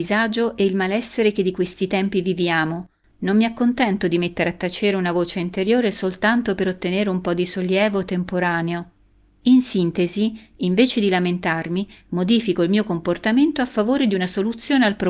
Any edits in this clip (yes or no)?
no